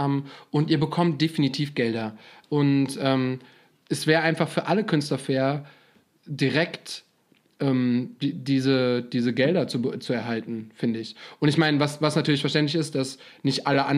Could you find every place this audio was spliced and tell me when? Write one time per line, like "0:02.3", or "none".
0:02.4